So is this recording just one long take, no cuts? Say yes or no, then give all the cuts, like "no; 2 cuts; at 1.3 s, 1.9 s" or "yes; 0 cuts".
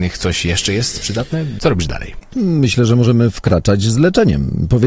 no; 1 cut; at 1.6 s